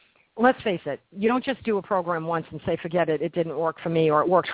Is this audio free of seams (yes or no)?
yes